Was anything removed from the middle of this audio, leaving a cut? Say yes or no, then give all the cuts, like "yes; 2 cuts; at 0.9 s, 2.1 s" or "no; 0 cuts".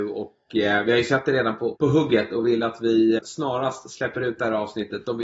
yes; 2 cuts; at 1.8 s, 3.2 s